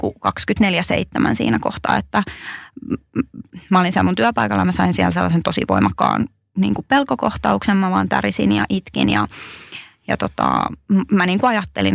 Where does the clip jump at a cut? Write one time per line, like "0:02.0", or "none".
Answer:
none